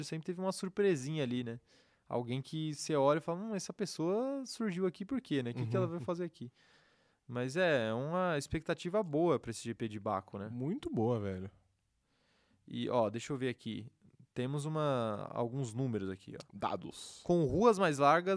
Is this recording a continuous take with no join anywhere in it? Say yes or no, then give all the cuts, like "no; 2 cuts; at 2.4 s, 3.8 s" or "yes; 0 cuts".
yes; 0 cuts